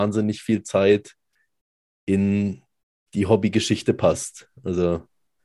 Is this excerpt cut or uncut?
uncut